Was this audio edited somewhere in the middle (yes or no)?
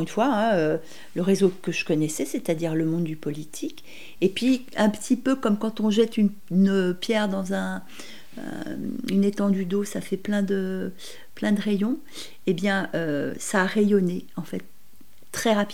no